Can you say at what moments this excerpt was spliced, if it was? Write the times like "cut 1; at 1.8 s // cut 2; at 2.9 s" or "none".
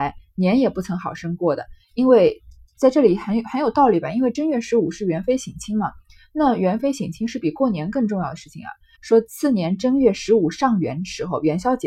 cut 1; at 8.9 s